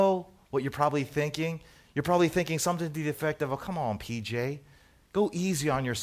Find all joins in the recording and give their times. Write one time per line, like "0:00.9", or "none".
none